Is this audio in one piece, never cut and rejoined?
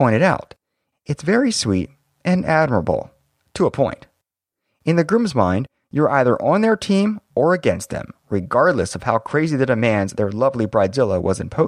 no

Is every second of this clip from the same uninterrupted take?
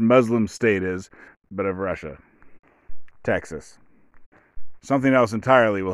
no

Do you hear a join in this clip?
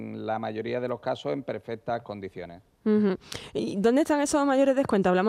no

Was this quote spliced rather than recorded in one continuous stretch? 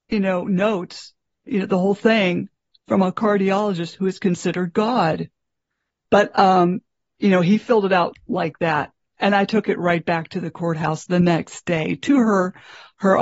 yes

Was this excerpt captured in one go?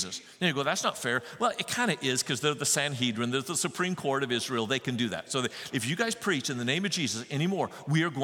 no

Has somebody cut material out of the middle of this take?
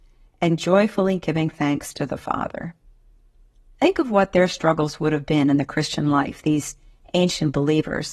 no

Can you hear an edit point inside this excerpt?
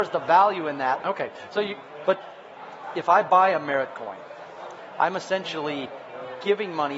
yes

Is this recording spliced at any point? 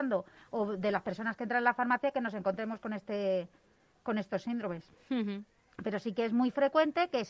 no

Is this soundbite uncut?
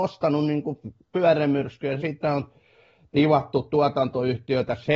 no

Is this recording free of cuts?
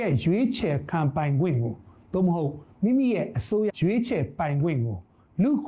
no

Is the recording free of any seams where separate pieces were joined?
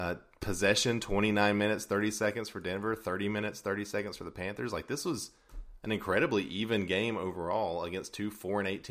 yes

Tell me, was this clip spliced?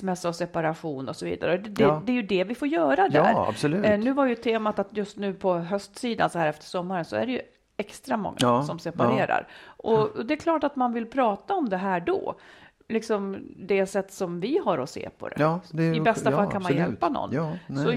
no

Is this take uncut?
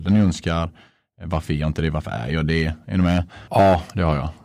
no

